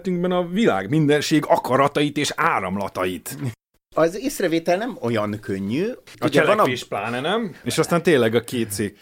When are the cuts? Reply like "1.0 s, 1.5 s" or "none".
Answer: 7.6 s